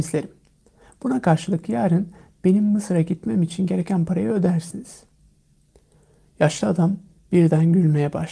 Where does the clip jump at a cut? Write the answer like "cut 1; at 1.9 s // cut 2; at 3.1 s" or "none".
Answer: none